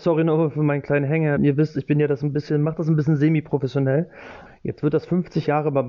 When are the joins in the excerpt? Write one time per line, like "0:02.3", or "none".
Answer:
0:01.4
0:04.5